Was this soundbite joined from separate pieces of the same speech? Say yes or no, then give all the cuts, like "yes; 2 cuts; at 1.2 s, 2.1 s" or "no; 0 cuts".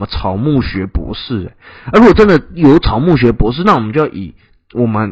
no; 0 cuts